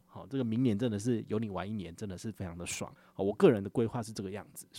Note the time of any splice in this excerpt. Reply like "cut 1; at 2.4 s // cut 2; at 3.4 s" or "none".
none